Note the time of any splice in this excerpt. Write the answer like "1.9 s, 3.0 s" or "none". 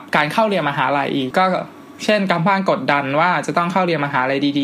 1.3 s